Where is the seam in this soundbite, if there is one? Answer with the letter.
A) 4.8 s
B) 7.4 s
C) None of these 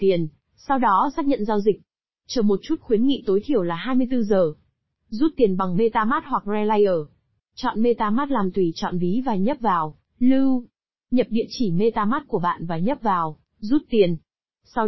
B